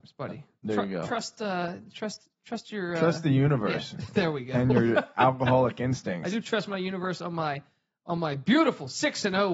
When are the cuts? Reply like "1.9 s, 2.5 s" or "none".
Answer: none